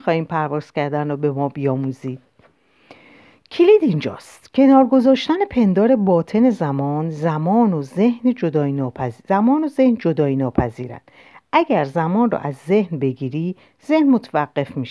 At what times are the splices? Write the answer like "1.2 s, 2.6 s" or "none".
none